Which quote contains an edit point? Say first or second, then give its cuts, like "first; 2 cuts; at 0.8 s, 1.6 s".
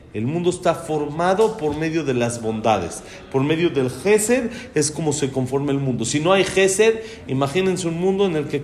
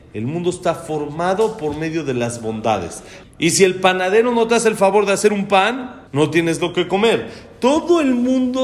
second; 2 cuts; at 3.2 s, 6.1 s